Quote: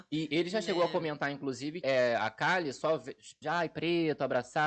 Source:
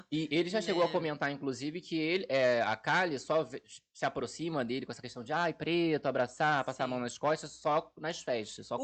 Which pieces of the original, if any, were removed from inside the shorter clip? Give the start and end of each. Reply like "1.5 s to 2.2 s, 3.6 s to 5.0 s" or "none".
1.8 s to 2.3 s, 3.9 s to 5.3 s